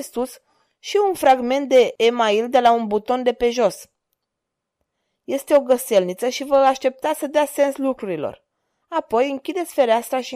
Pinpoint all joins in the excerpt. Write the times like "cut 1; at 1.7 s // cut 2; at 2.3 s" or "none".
none